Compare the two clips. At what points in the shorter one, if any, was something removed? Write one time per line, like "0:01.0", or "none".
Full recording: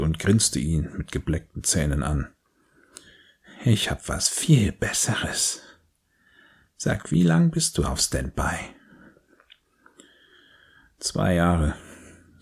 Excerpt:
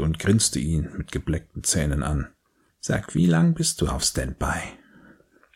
0:02.7